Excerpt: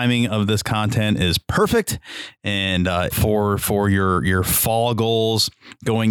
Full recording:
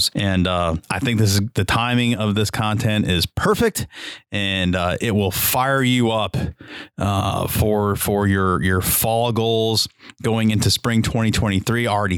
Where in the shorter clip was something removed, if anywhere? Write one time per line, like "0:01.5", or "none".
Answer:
0:03.1